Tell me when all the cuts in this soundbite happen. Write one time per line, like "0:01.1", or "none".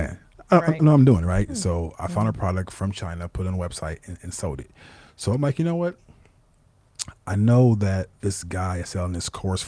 0:01.5